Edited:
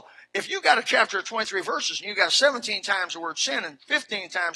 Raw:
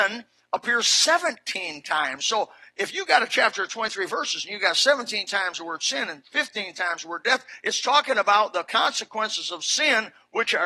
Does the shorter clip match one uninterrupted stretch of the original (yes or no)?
yes